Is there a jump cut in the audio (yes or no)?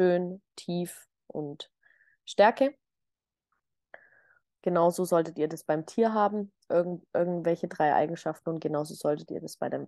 no